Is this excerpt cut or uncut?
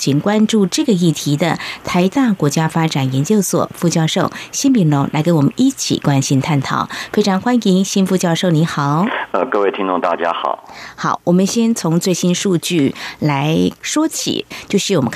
uncut